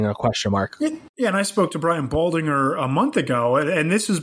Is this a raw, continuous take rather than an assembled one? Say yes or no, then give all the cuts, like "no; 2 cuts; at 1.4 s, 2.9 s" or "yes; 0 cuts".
no; 1 cut; at 1.1 s